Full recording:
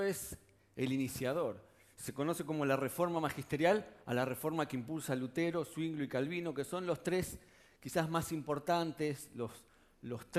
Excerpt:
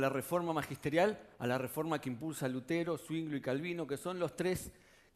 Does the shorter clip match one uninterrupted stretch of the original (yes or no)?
yes